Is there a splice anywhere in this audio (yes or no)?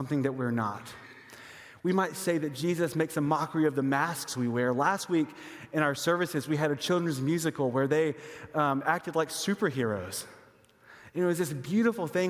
no